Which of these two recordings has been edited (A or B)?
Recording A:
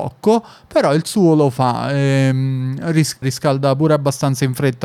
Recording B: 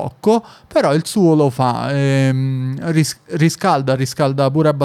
A